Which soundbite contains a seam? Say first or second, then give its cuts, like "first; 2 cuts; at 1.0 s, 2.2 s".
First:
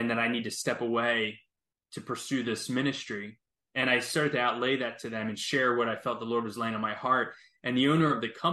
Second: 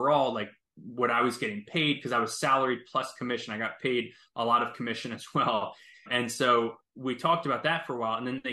second; 1 cut; at 5.9 s